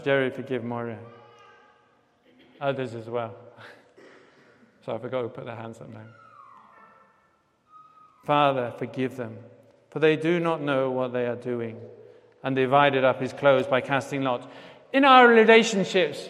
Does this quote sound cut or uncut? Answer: uncut